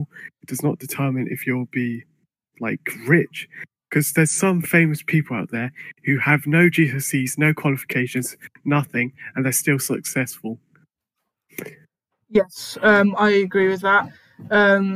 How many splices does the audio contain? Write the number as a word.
zero